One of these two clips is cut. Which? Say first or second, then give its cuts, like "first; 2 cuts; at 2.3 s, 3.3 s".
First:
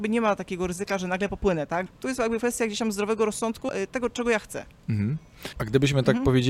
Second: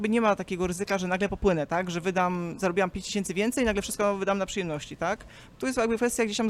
first; 3 cuts; at 1.9 s, 3.7 s, 5.5 s